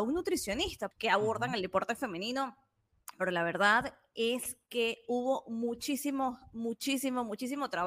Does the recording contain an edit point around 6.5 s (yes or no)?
no